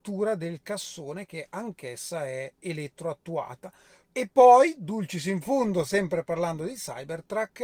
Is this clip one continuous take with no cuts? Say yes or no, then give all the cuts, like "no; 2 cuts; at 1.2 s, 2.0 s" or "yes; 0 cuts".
no; 1 cut; at 4.0 s